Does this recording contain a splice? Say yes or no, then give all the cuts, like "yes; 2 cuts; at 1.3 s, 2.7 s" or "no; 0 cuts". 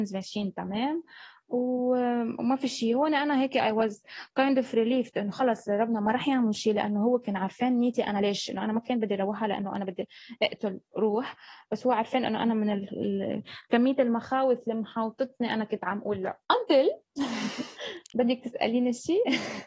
yes; 1 cut; at 16.4 s